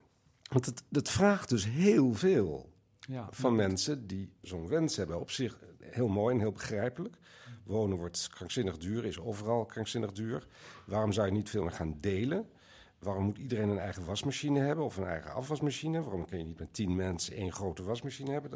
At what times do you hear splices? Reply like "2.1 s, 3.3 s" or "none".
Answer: 4.4 s